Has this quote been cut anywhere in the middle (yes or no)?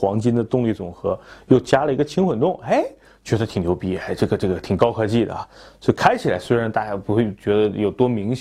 no